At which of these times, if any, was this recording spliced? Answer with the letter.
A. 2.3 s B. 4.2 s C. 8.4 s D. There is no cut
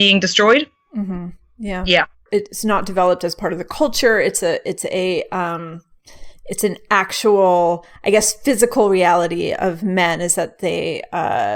A